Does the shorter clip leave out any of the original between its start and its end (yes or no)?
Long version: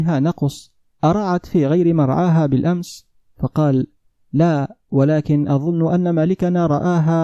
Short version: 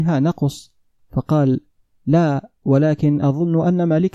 yes